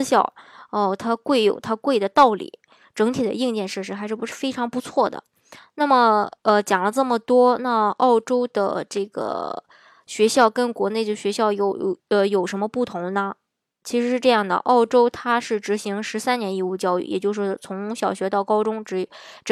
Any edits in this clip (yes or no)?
no